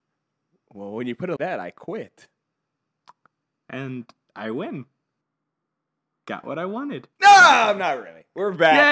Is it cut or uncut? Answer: cut